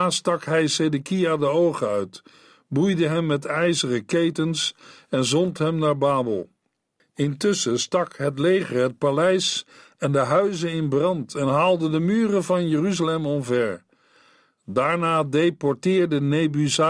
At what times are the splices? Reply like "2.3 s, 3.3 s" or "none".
none